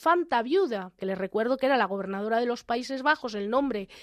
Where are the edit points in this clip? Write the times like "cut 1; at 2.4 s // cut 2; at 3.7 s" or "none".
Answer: cut 1; at 1.0 s